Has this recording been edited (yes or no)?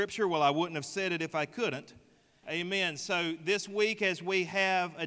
yes